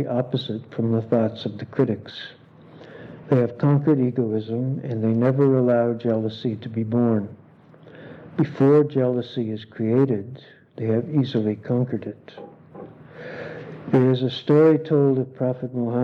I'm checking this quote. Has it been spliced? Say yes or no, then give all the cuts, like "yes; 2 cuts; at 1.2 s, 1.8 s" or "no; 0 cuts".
no; 0 cuts